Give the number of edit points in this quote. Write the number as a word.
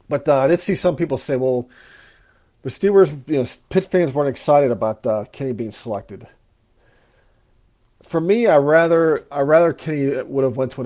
zero